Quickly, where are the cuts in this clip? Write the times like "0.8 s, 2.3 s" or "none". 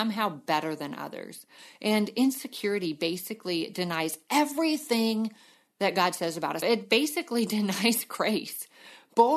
6.6 s